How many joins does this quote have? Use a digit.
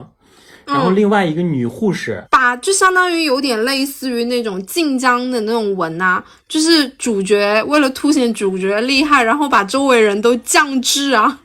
1